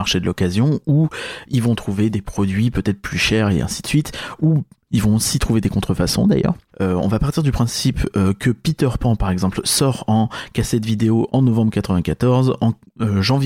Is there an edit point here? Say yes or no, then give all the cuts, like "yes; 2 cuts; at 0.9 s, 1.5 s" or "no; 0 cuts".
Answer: yes; 1 cut; at 6.7 s